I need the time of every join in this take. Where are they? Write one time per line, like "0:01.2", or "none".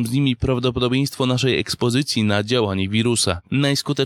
none